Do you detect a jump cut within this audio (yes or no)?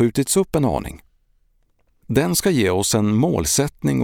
yes